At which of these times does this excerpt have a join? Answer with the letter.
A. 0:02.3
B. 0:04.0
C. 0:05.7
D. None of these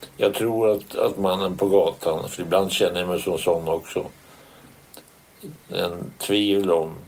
C